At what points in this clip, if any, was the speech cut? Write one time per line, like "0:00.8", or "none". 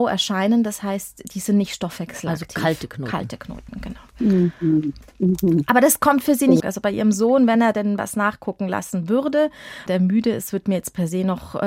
0:06.6
0:09.9